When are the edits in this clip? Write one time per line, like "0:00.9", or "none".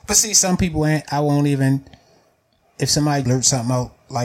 0:03.2